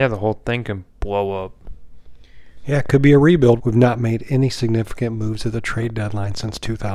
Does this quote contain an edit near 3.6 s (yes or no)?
yes